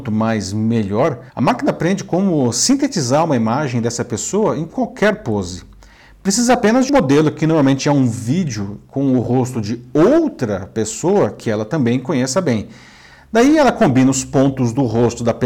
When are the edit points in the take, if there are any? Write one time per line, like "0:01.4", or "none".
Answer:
0:01.3
0:06.9